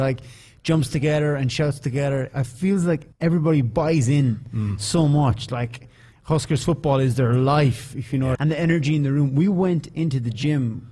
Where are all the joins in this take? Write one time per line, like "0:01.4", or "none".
0:03.1
0:08.4